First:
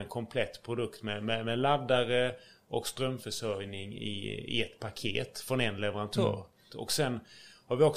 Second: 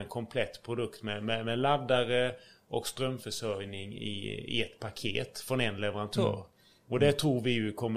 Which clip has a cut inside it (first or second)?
first